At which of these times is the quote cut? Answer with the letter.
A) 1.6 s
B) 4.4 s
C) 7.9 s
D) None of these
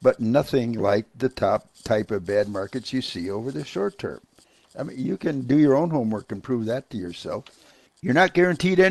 C